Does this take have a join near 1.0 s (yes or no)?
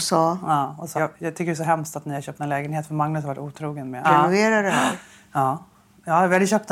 yes